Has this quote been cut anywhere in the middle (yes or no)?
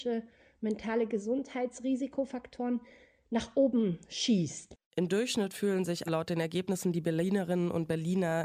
yes